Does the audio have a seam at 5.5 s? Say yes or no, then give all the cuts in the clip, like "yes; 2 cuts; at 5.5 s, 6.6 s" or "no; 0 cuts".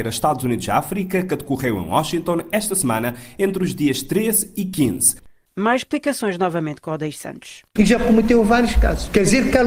yes; 2 cuts; at 5.5 s, 7.8 s